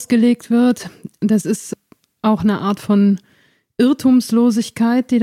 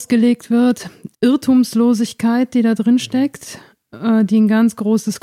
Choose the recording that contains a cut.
second; 1 cut; at 1.1 s

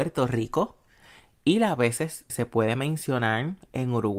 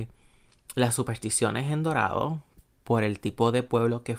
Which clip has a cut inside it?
first; 1 cut; at 2.3 s

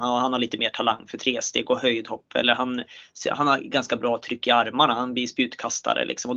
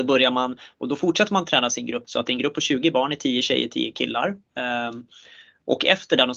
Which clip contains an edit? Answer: second; 1 cut; at 2.0 s

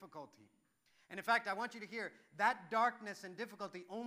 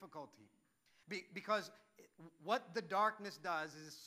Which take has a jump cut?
second; 1 cut; at 1.0 s

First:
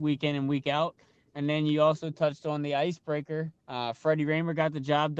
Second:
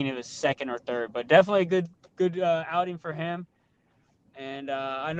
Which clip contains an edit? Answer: first; 1 cut; at 3.6 s

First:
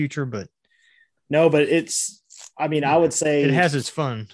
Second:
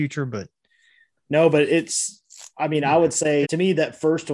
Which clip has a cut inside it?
second; 1 cut; at 3.4 s

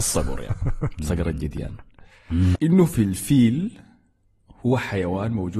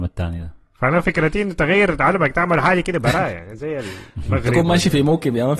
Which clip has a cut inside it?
first; 1 cut; at 2.5 s

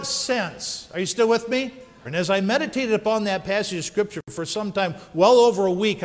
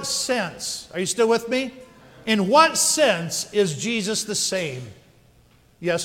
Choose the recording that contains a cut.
first; 1 cut; at 2.1 s

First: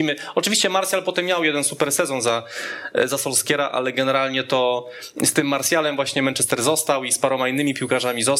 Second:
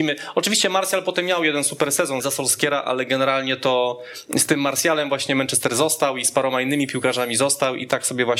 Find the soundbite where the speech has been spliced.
second; 1 cut; at 2.2 s

